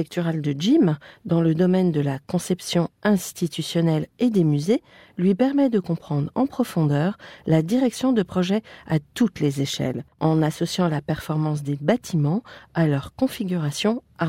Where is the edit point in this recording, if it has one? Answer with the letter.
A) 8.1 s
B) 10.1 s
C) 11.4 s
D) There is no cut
B